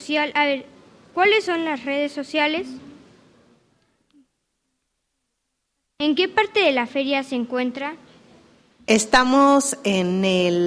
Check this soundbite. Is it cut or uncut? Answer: uncut